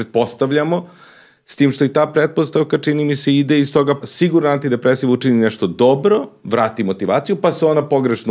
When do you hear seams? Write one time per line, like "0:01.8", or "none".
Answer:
0:04.0